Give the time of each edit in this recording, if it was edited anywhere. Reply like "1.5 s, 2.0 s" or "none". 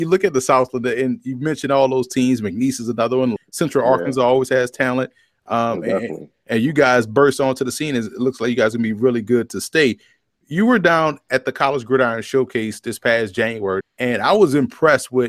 3.4 s, 13.8 s